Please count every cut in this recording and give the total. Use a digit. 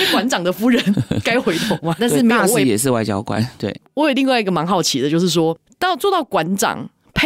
1